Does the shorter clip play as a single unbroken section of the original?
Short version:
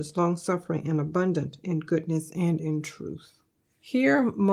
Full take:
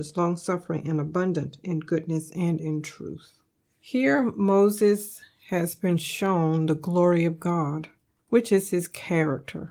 yes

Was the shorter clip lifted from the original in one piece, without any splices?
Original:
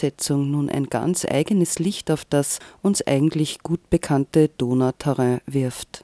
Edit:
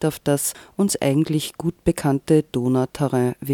yes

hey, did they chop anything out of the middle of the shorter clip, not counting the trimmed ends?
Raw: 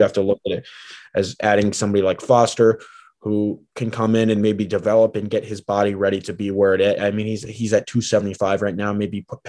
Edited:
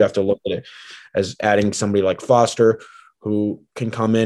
no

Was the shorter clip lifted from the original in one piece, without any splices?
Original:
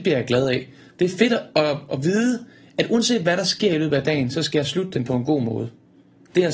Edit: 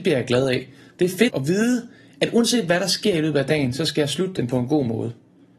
no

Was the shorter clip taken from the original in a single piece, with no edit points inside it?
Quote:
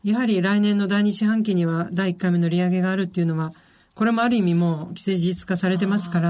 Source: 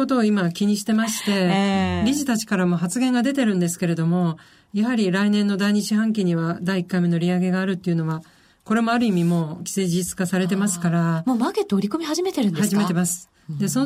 yes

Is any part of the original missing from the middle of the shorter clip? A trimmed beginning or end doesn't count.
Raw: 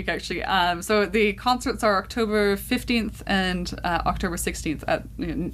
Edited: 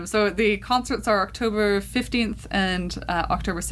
no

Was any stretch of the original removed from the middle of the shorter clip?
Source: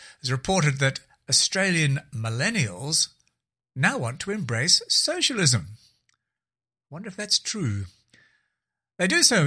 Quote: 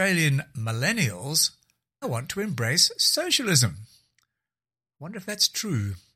yes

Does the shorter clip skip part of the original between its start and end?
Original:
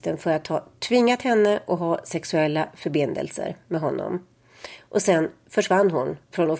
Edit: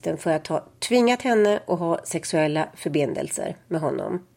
no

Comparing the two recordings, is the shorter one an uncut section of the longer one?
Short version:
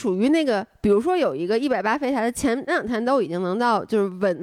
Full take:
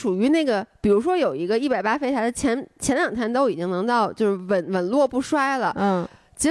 no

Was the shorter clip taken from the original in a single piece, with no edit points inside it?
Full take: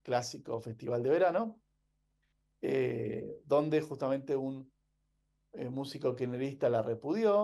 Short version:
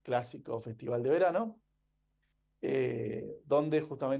yes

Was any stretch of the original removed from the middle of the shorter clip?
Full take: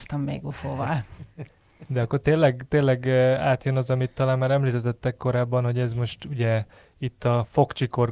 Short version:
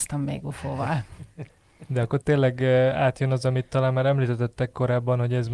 yes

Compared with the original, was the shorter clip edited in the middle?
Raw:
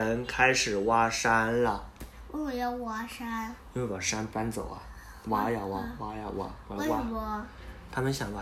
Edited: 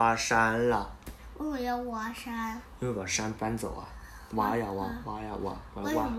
no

